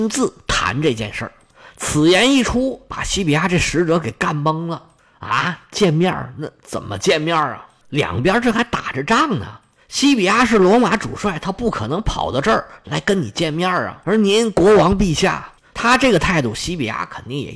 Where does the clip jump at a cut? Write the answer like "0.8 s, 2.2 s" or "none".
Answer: 15.6 s